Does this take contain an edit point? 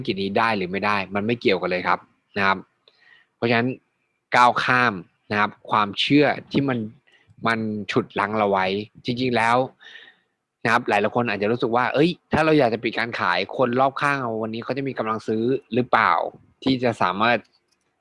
no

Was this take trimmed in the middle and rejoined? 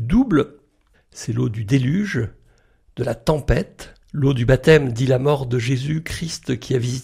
yes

